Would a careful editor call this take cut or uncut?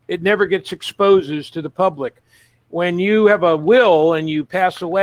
uncut